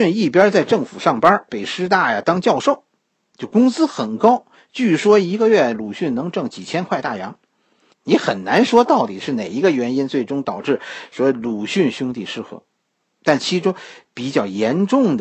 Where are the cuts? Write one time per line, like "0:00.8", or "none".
0:01.5
0:07.9